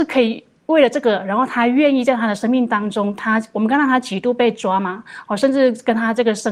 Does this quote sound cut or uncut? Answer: uncut